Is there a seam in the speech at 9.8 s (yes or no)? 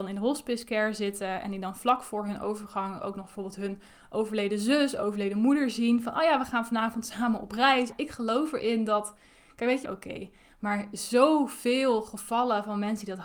yes